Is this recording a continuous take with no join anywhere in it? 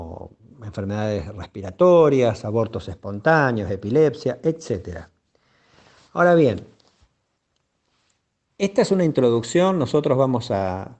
yes; 0 cuts

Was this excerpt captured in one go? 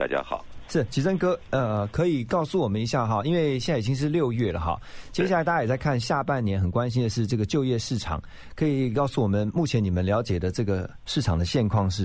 no; 1 cut; at 1.5 s

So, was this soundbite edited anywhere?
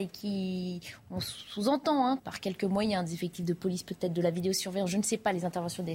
yes; 1 cut; at 2.2 s

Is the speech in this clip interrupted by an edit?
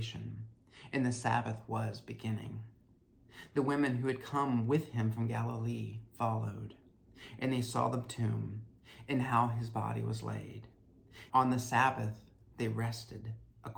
yes; 1 cut; at 11.3 s

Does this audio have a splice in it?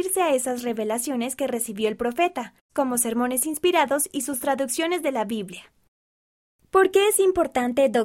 yes; 1 cut; at 2.7 s

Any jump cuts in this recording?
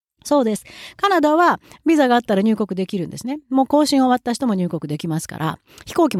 no; 0 cuts

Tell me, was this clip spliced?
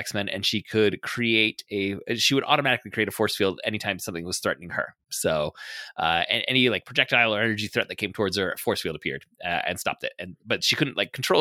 no; 0 cuts

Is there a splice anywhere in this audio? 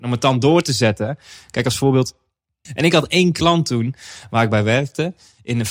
yes; 1 cut; at 2.7 s

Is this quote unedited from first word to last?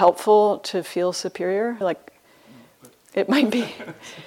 no; 1 cut; at 1.8 s

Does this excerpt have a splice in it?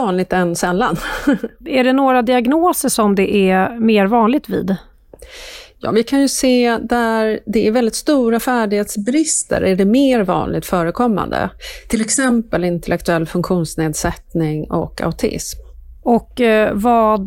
no; 0 cuts

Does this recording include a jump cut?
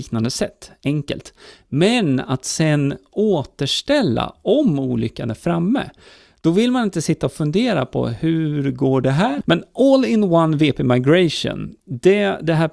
yes; 1 cut; at 9.4 s

